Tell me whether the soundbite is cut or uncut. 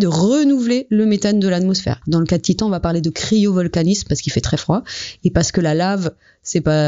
cut